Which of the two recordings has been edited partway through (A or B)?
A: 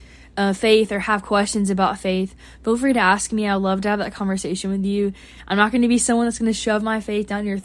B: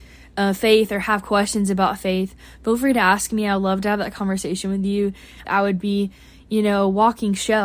B